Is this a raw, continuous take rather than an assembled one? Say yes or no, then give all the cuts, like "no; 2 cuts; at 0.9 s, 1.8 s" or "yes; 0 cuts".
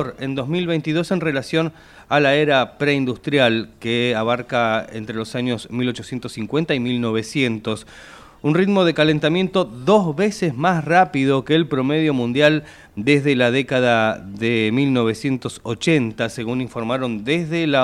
yes; 0 cuts